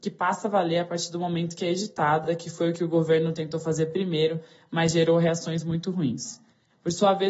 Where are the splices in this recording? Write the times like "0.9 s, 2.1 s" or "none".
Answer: none